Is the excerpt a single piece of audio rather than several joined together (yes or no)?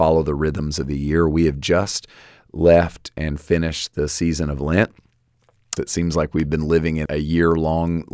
no